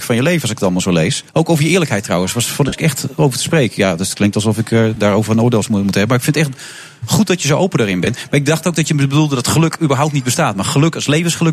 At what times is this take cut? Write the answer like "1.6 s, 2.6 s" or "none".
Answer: 1.3 s